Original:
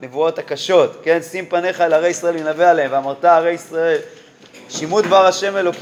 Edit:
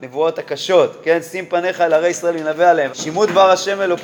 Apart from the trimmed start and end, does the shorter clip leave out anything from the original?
yes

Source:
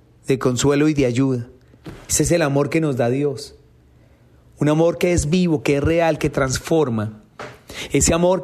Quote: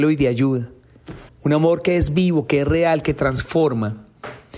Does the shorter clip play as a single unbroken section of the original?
no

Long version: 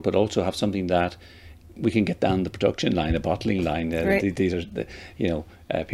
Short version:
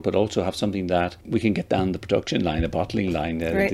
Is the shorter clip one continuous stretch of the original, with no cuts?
no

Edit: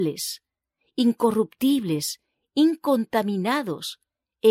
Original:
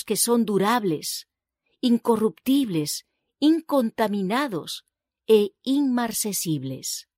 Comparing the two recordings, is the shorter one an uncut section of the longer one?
yes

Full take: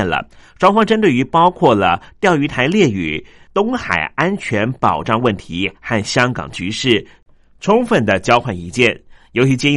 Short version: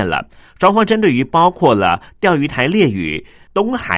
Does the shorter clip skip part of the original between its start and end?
no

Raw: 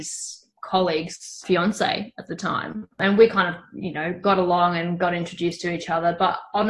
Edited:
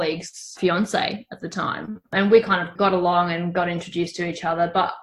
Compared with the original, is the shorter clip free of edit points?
no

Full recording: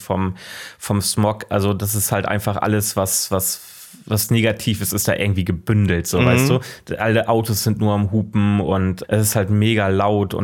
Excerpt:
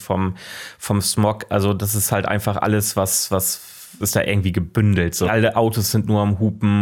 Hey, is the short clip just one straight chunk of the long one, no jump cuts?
no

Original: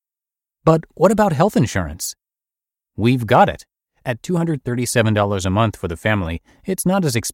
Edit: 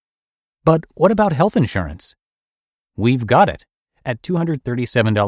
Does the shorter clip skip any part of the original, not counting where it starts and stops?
no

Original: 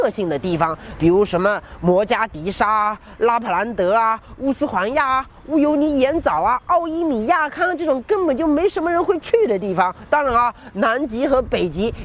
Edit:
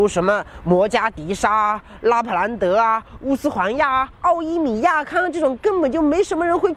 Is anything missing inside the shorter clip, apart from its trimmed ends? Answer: yes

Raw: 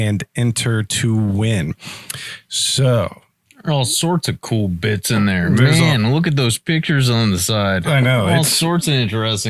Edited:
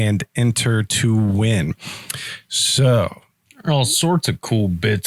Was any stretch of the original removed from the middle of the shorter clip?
no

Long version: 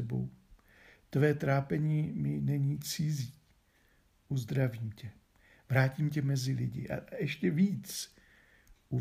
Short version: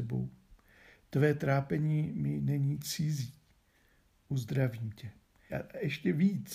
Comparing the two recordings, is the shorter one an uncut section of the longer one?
no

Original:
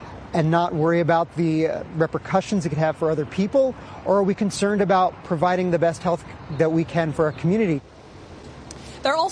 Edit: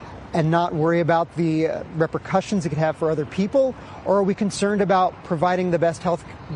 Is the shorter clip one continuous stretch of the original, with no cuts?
yes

